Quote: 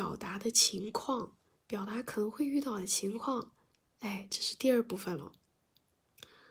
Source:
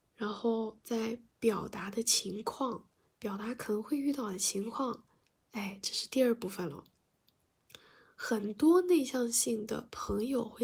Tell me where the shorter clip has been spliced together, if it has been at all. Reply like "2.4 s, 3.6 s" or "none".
none